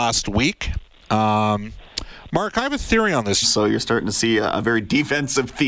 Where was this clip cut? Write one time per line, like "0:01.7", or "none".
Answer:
0:03.4